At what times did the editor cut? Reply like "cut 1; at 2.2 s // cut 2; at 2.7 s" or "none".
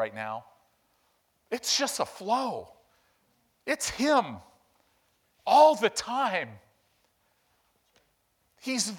none